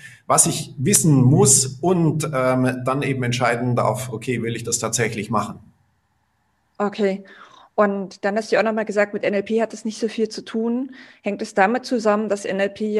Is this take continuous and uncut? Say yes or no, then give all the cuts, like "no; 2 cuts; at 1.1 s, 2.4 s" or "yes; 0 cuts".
yes; 0 cuts